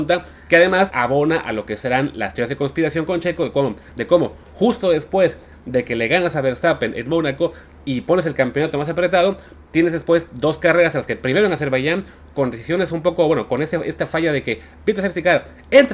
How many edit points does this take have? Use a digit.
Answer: 1